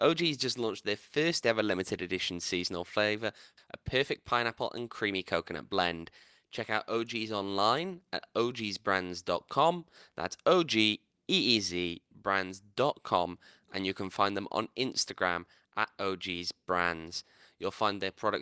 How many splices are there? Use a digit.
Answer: 1